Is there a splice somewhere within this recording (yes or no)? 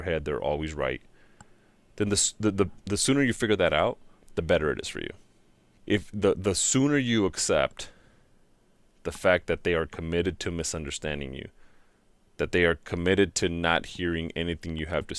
yes